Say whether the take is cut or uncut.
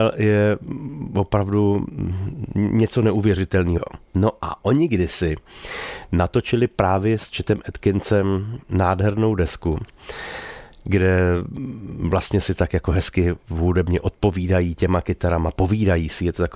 cut